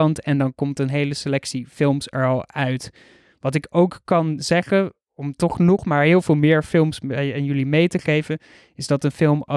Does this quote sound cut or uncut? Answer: uncut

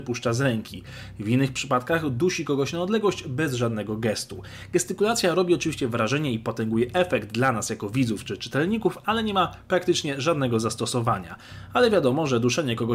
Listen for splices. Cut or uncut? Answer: uncut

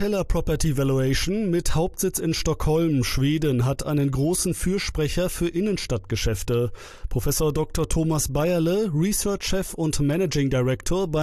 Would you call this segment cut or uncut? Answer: uncut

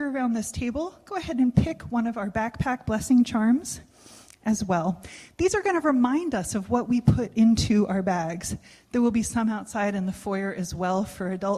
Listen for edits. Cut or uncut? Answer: uncut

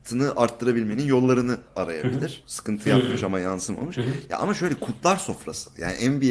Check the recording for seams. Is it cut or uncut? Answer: cut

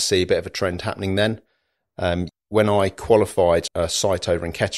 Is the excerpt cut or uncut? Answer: cut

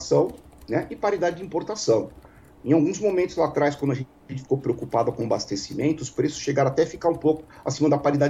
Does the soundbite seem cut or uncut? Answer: uncut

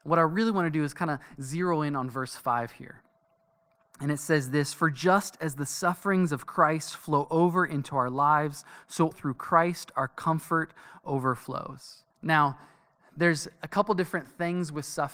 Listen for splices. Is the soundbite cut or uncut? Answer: cut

